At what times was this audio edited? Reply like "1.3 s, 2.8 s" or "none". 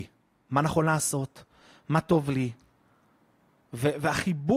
none